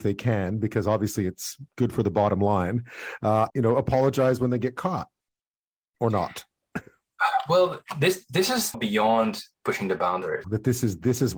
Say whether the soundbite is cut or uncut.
cut